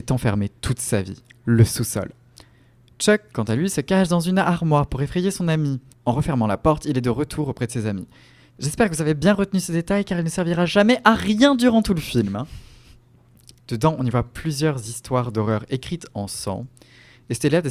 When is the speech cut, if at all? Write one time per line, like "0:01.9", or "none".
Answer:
0:05.9
0:13.6